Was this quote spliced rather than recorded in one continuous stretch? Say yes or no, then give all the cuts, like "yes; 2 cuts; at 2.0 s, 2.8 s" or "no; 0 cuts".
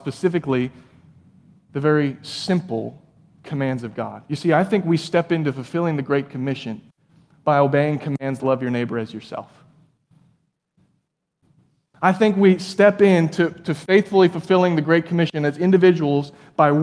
yes; 1 cut; at 8.4 s